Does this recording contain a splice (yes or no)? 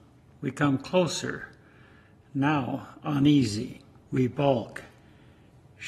yes